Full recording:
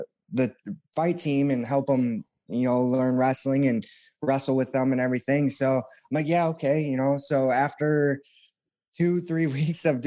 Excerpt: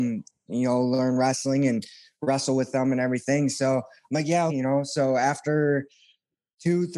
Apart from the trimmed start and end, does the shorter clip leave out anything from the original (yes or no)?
yes